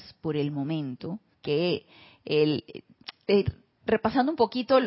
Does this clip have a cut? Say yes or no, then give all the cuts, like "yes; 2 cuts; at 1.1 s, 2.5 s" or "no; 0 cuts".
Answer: yes; 1 cut; at 1.3 s